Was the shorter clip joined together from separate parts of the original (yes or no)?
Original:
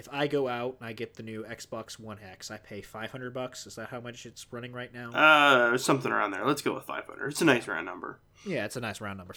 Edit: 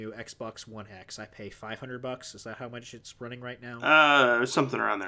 no